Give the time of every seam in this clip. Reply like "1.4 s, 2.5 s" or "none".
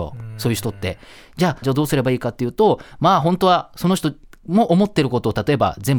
1.6 s